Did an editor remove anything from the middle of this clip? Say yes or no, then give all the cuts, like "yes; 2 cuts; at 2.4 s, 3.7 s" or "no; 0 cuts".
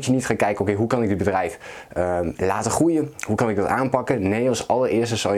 no; 0 cuts